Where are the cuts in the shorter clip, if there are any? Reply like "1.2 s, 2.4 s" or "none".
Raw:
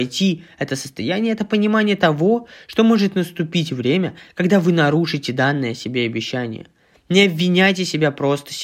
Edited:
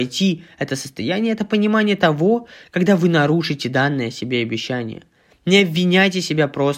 2.6 s

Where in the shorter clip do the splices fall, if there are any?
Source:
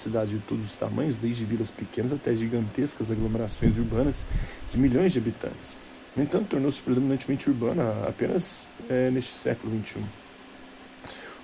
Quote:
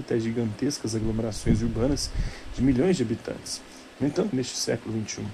4.3 s

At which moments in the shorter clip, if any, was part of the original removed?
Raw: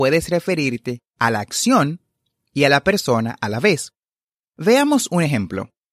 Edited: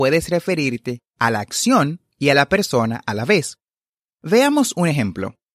2.1 s

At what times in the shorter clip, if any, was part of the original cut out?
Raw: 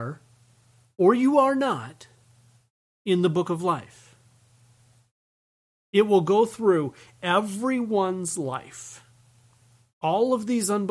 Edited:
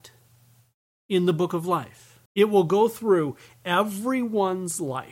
2.3 s

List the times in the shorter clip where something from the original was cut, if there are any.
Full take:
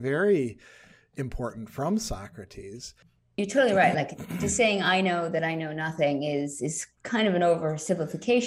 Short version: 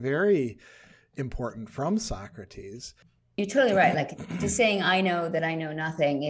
none

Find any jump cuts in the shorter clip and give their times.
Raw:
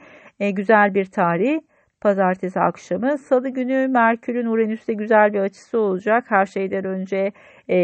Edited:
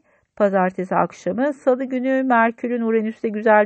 none

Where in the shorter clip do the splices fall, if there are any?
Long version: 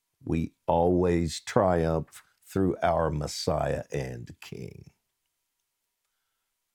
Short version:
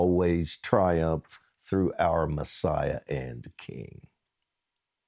none

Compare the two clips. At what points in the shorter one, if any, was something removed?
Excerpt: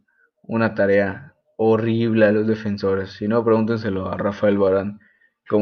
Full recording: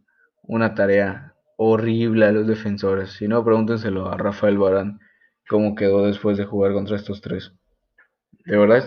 none

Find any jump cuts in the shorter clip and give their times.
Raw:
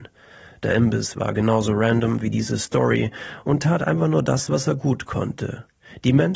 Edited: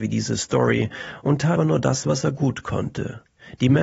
1.6 s

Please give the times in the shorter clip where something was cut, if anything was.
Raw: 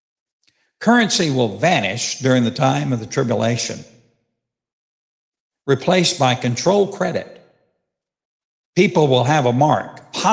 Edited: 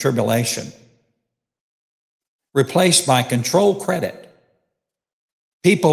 none

